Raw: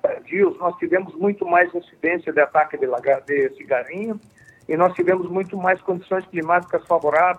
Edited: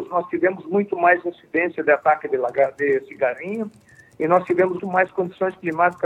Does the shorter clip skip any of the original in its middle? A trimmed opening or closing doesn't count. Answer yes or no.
yes